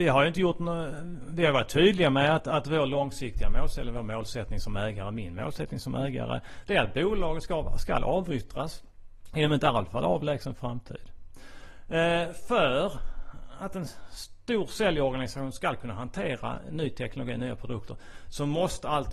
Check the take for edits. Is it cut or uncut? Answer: uncut